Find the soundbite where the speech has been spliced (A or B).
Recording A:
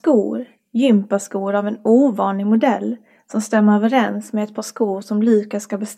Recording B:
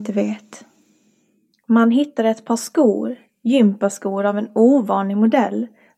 B